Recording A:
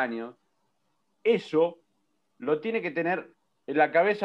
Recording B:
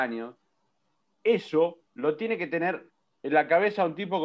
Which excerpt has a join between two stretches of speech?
B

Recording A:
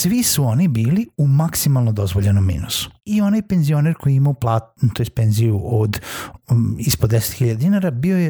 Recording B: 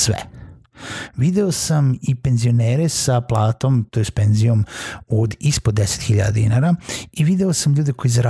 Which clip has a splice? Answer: A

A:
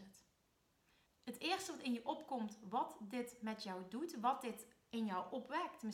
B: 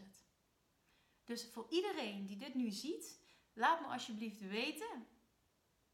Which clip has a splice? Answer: A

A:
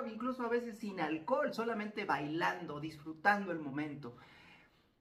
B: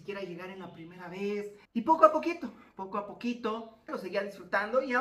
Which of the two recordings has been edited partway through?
B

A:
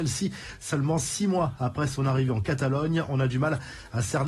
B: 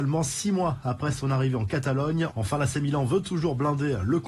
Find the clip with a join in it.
B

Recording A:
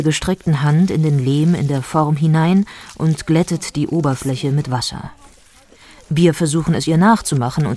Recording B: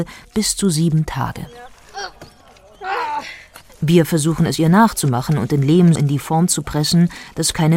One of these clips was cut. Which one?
B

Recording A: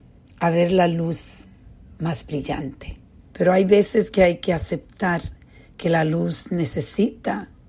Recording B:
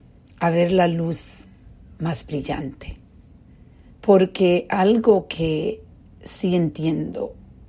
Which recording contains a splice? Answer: A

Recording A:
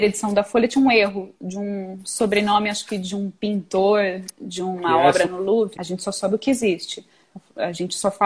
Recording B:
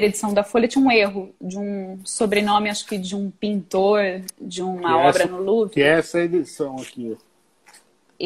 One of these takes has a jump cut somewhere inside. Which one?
A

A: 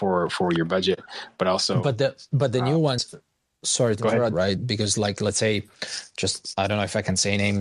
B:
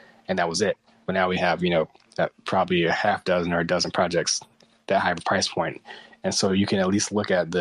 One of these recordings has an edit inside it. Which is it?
A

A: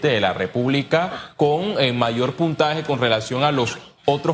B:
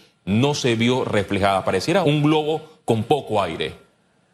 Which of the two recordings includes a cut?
B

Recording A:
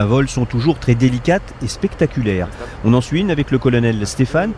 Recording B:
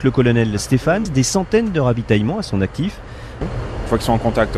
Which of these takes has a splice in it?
B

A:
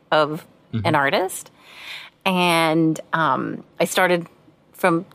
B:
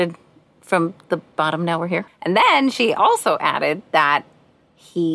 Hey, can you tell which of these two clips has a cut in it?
B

